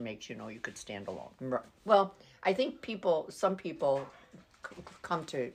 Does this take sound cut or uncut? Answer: cut